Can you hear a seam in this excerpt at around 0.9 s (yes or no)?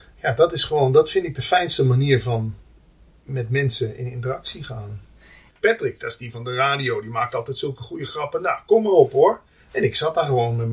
no